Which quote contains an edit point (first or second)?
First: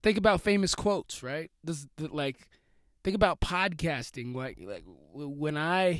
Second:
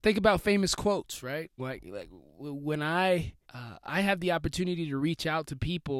second